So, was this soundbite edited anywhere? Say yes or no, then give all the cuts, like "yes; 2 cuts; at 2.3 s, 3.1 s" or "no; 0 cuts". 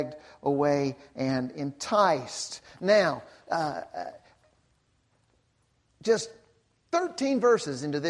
no; 0 cuts